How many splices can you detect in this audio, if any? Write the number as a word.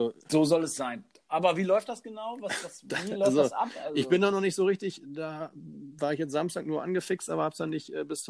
zero